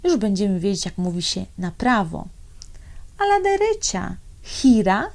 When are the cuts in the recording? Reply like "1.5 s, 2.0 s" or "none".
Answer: none

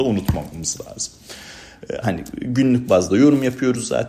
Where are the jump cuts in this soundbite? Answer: 2.0 s

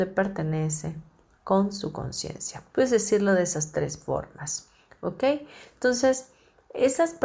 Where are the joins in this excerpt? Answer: 2.7 s

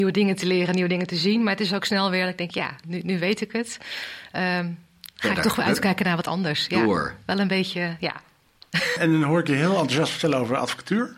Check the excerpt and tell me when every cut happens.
9.0 s

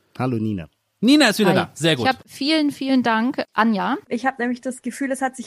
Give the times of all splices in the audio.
2.2 s, 4.0 s

